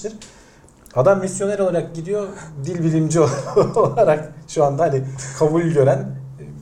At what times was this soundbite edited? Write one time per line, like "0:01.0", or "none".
none